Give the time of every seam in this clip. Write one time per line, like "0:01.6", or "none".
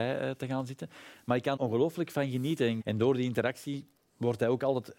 0:01.6
0:02.8